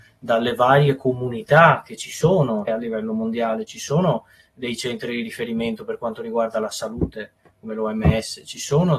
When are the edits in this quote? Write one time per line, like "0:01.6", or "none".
0:02.7